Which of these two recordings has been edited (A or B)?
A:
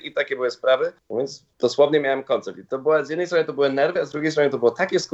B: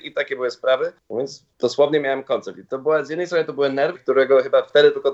B